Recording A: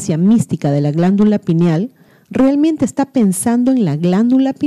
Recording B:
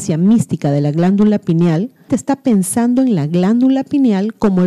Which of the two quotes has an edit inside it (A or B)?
B